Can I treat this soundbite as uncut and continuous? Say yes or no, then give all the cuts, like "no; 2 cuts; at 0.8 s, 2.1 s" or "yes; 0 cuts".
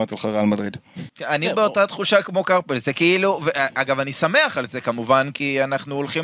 no; 1 cut; at 1.1 s